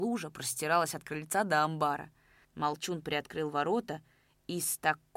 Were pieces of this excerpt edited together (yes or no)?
yes